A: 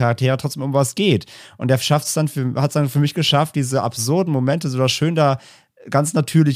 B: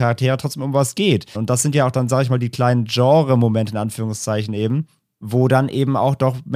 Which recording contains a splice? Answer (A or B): B